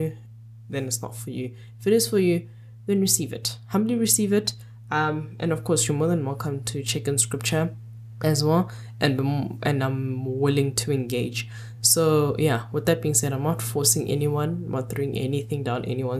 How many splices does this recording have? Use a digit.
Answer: 0